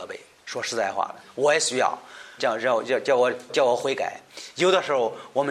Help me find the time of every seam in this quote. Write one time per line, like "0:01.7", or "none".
0:02.4
0:03.5

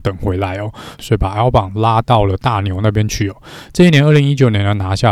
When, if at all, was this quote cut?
0:01.0

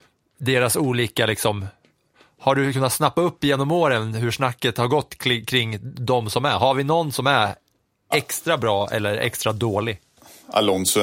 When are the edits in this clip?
none

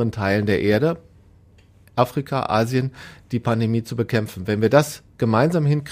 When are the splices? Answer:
none

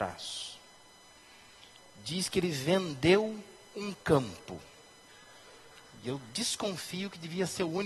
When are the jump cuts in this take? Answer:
none

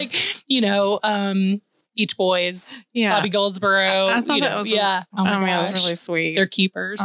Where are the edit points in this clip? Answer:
0:05.1

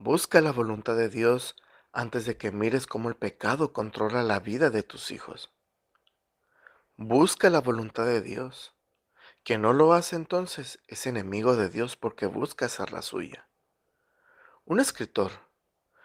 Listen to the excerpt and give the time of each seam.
none

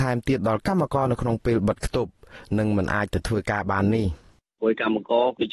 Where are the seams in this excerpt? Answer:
none

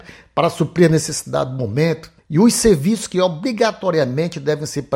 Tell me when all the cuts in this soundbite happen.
0:02.2

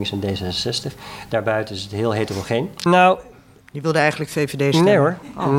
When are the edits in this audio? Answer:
0:02.9

